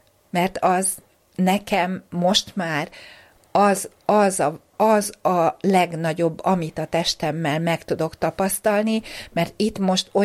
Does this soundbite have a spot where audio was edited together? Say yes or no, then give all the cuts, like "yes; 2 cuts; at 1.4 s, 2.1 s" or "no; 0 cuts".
no; 0 cuts